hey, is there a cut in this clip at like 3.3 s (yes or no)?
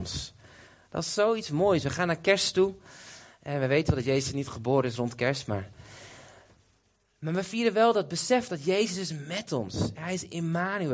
no